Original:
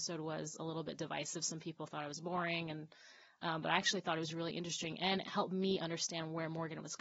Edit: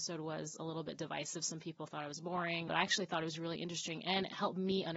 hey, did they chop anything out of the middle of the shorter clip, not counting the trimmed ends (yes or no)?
yes